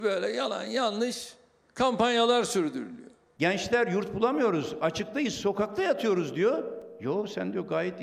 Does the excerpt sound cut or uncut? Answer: uncut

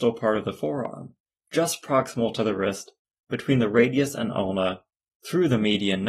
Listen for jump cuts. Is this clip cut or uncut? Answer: uncut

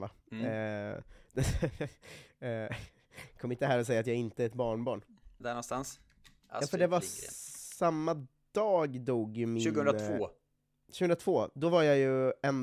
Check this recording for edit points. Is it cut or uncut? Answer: cut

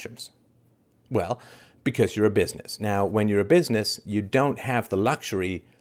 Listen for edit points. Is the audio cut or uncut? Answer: uncut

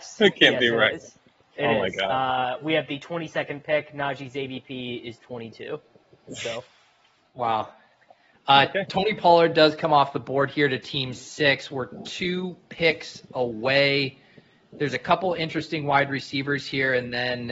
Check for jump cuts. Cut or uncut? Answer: uncut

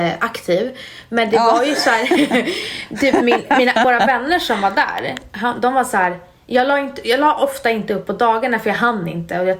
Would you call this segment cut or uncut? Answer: uncut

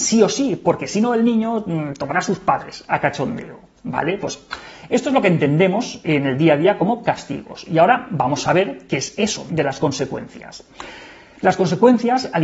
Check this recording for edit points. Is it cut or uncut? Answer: cut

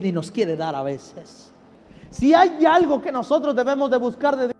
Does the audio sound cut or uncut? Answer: uncut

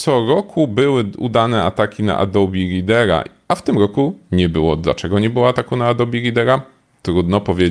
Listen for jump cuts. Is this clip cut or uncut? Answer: uncut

